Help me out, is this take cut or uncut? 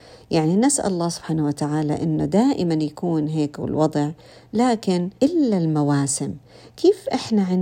cut